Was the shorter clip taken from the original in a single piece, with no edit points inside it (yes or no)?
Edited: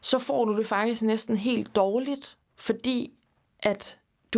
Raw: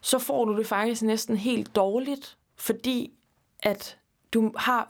yes